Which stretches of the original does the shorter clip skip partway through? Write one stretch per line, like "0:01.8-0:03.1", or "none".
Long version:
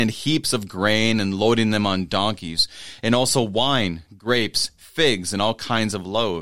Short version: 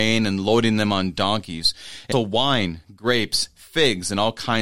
0:03.1-0:03.3